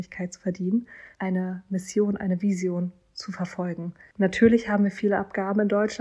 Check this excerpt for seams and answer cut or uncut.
cut